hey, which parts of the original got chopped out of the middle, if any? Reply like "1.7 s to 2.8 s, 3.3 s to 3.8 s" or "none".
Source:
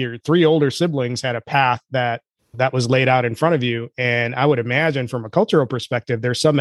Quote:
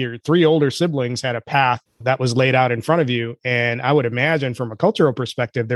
1.9 s to 2.4 s